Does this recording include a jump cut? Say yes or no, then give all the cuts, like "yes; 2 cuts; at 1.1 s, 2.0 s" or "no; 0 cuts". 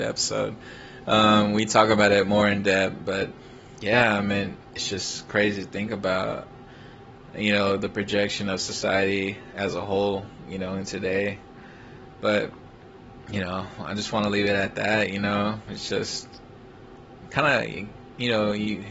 no; 0 cuts